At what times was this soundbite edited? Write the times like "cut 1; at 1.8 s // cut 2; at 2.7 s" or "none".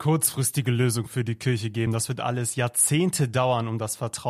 none